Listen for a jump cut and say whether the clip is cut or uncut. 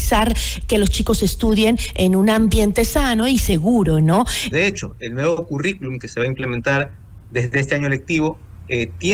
cut